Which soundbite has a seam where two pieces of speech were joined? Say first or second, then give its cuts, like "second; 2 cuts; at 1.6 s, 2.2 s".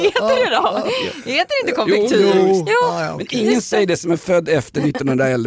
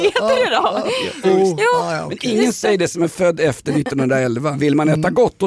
second; 2 cuts; at 1.2 s, 4.5 s